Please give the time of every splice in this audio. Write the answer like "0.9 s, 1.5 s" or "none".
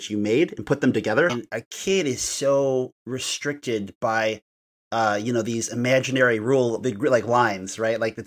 1.3 s